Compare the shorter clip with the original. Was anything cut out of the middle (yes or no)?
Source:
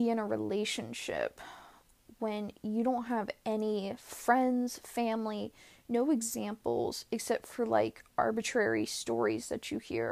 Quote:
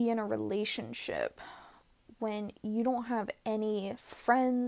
no